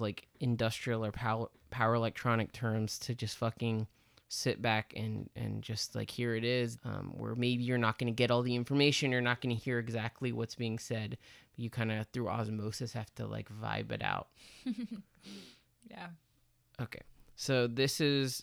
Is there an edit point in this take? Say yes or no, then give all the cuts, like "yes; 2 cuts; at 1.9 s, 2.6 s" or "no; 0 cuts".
yes; 1 cut; at 6.8 s